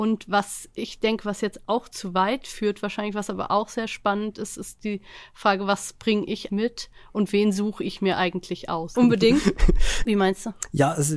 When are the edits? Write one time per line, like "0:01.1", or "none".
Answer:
0:06.5
0:08.9
0:10.0

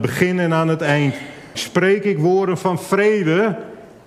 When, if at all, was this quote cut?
0:01.5

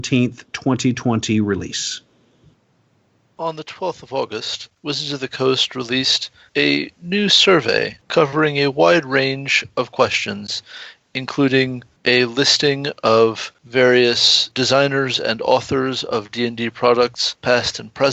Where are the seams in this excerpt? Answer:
none

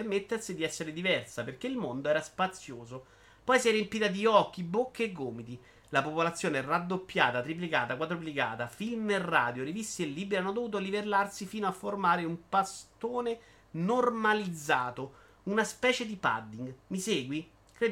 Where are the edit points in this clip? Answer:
none

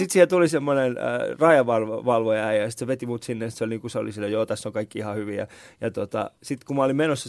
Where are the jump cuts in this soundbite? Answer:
none

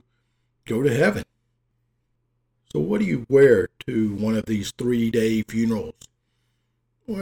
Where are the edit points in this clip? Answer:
none

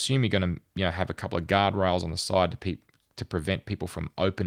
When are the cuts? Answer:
none

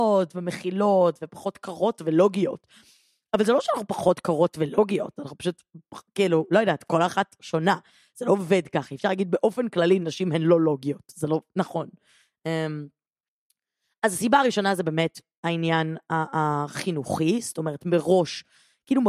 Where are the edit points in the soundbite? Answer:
none

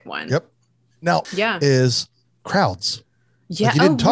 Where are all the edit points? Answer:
0:01.2

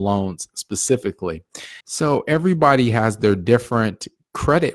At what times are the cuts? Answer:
0:01.8

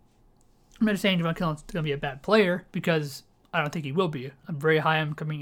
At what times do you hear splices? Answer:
0:02.7

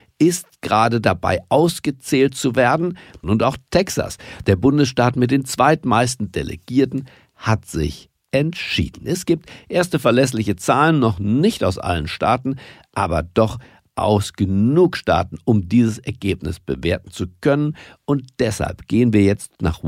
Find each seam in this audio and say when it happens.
0:03.2

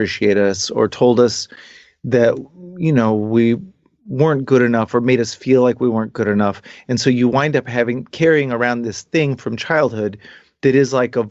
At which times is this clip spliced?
none

